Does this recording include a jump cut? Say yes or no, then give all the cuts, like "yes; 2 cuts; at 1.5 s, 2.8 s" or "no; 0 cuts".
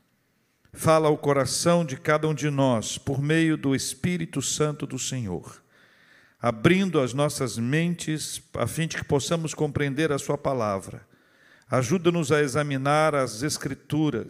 no; 0 cuts